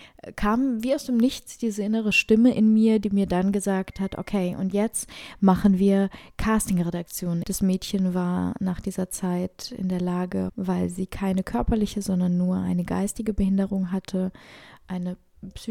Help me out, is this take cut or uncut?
cut